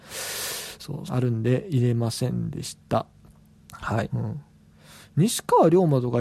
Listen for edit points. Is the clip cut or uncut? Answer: cut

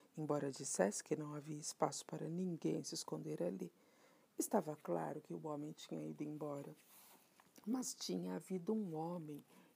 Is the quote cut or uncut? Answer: uncut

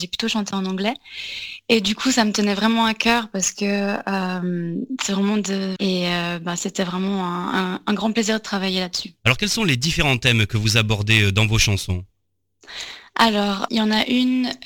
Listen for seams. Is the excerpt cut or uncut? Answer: cut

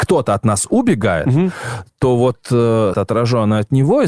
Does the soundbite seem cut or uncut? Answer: cut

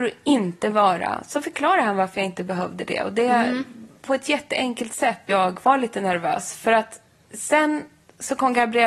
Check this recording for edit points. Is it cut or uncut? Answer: cut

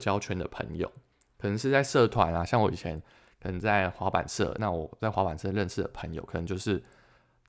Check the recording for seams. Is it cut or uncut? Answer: uncut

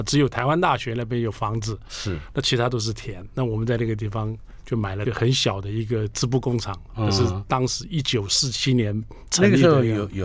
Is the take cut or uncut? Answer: uncut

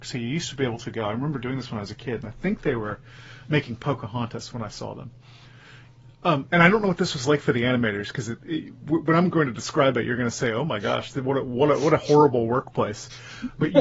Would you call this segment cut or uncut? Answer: uncut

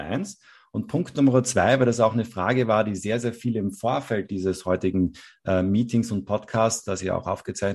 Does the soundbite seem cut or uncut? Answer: uncut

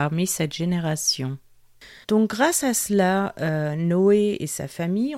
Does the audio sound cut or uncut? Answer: cut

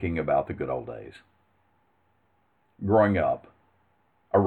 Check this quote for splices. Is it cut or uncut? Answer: uncut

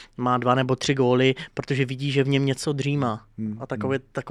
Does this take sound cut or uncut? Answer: uncut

